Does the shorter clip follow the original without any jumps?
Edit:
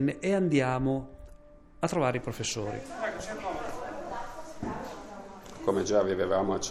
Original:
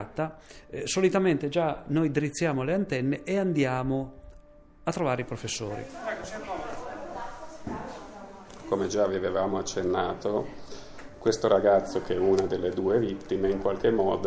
yes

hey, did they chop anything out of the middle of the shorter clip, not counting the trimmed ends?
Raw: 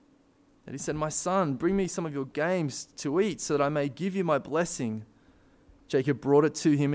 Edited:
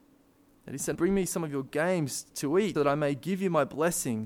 yes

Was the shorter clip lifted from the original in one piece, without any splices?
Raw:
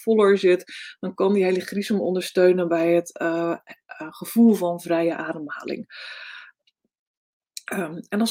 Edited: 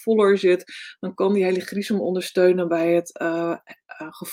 yes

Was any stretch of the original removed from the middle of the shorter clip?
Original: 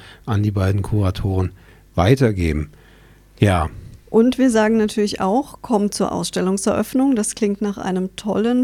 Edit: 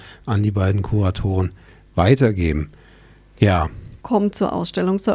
yes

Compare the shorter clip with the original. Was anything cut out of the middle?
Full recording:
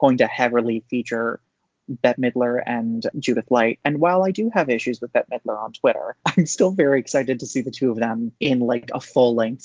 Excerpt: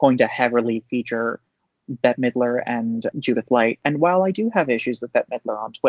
no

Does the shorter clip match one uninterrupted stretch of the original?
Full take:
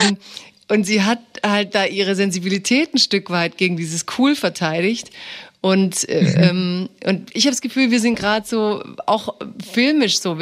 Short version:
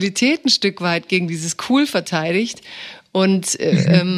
yes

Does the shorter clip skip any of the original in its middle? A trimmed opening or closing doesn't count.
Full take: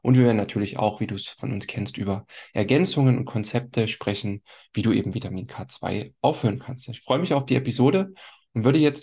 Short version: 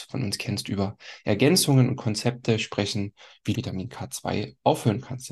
yes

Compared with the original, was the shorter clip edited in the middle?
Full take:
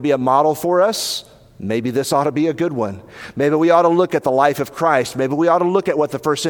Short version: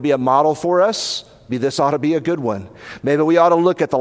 yes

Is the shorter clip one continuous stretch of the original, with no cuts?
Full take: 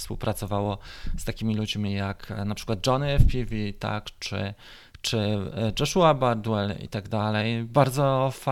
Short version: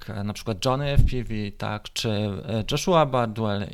no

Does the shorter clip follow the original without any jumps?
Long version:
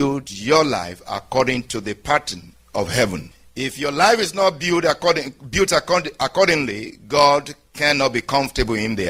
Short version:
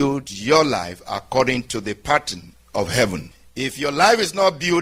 yes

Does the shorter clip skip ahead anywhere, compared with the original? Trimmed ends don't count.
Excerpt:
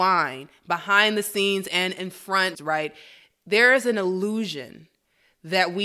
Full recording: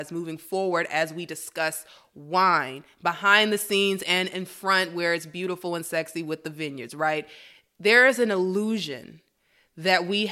yes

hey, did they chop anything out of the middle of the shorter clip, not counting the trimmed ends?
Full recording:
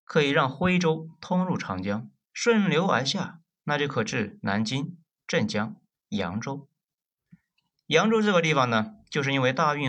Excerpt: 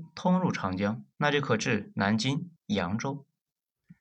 yes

